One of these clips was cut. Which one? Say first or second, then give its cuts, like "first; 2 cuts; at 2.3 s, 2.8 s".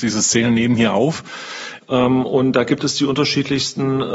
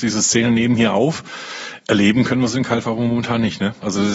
first; 1 cut; at 1.8 s